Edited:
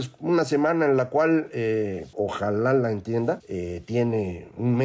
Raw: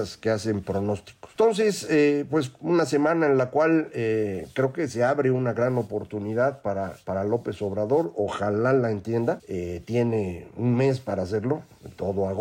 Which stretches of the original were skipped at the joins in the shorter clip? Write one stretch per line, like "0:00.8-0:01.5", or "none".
0:04.5-0:08.1